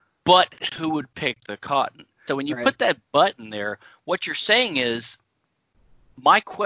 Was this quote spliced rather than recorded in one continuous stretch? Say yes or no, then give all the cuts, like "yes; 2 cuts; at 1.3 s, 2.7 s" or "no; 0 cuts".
yes; 1 cut; at 2.3 s